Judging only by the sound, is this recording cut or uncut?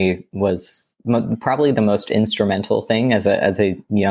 uncut